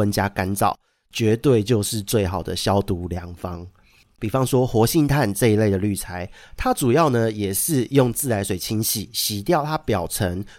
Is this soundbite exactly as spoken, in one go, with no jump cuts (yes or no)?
no